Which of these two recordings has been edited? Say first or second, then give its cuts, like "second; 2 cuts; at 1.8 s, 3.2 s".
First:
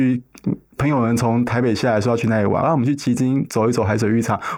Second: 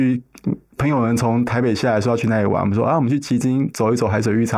first; 1 cut; at 2.6 s